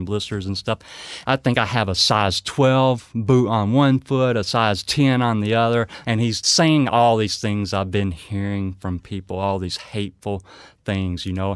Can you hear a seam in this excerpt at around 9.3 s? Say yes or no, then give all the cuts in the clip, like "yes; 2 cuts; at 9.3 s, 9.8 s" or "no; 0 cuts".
no; 2 cuts; at 1.2 s, 6.0 s